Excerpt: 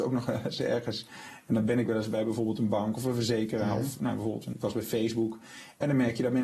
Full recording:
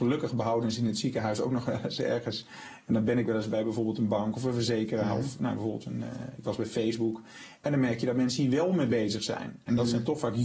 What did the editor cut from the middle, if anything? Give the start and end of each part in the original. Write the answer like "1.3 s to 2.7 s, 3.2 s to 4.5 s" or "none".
5.9 s to 6.4 s